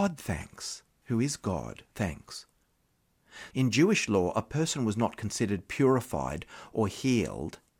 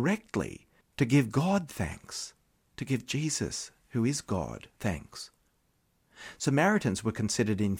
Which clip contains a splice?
first; 2 cuts; at 1.0 s, 3.5 s

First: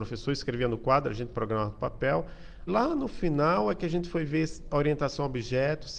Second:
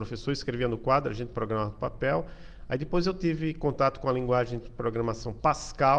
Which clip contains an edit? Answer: first; 1 cut; at 2.7 s

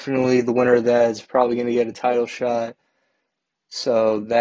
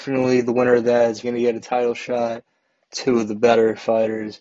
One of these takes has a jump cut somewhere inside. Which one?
second; 2 cuts; at 1.2 s, 2.8 s

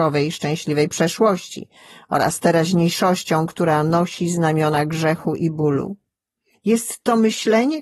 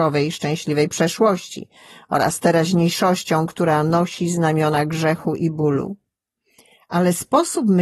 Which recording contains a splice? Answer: first; 1 cut; at 6.5 s

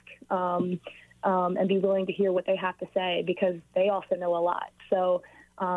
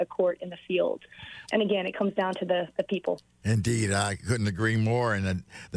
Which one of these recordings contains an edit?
second; 1 cut; at 1.4 s

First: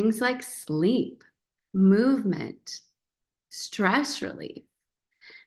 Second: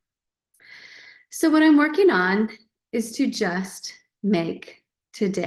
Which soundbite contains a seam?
first; 2 cuts; at 1.6 s, 3.4 s

